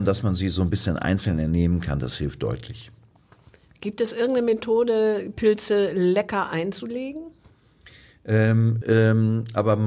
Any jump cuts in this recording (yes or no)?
yes